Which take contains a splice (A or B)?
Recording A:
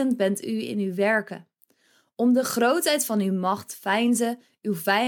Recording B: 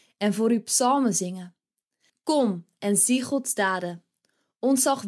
B